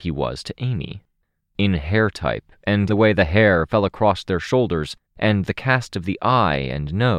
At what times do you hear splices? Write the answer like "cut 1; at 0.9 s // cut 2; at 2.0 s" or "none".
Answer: cut 1; at 2.9 s // cut 2; at 5.1 s